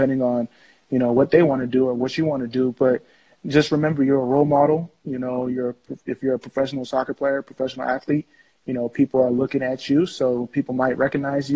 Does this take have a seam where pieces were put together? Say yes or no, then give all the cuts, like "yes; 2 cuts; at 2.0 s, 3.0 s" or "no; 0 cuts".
no; 0 cuts